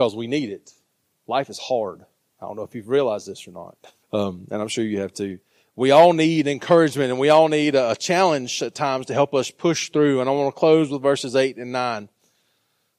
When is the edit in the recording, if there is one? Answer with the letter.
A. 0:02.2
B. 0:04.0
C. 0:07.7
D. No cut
B